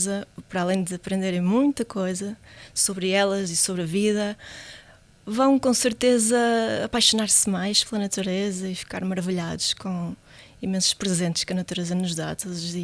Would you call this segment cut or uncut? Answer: uncut